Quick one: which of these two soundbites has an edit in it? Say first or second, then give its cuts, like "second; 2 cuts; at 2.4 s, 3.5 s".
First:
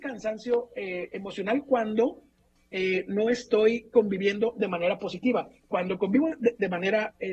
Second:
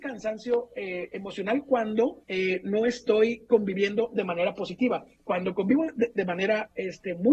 second; 1 cut; at 2.2 s